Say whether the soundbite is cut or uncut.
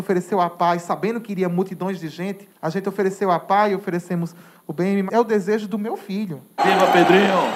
cut